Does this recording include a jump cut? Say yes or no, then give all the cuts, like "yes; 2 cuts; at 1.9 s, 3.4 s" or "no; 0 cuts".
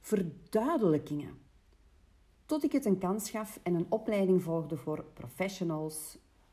yes; 1 cut; at 2.3 s